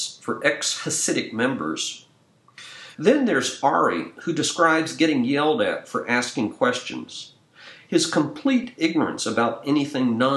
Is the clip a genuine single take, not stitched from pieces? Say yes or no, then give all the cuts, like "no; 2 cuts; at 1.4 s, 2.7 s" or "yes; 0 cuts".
no; 1 cut; at 2.9 s